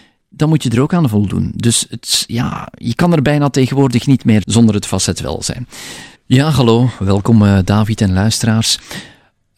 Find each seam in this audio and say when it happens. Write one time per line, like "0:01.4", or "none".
0:04.4
0:06.1